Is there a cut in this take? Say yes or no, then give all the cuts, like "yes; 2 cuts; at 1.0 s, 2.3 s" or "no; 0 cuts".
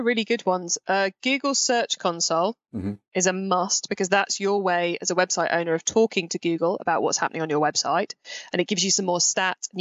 no; 0 cuts